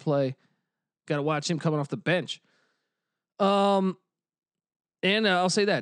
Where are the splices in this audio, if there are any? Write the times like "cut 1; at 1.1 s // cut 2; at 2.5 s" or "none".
cut 1; at 1.0 s